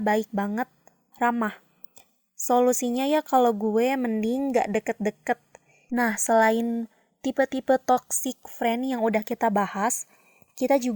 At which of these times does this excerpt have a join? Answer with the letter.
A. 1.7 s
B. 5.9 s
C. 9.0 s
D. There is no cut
B